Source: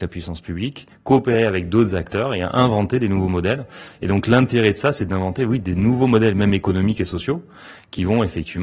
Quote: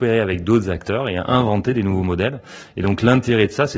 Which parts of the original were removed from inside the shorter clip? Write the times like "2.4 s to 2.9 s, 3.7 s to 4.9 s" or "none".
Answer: none